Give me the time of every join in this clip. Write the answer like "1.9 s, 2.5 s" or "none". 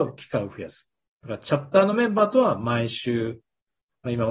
none